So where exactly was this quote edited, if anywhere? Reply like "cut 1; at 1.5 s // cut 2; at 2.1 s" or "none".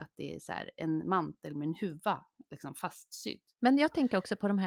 cut 1; at 3.5 s